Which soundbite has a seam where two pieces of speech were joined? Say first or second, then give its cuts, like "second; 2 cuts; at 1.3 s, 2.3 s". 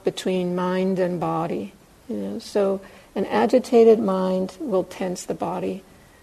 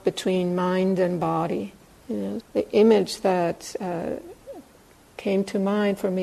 second; 1 cut; at 2.4 s